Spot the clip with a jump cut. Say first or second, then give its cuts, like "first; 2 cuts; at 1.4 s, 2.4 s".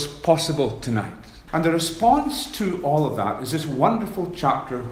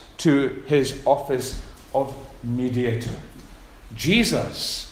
first; 1 cut; at 1.5 s